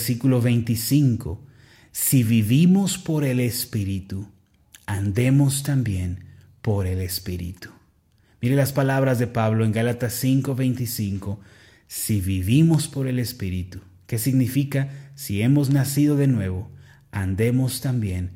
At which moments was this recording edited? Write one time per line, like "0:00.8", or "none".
none